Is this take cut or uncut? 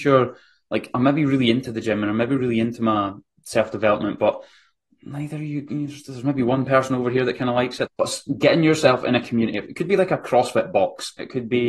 cut